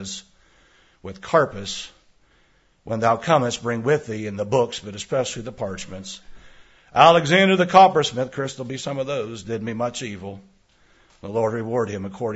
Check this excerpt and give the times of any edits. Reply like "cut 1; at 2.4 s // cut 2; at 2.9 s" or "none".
none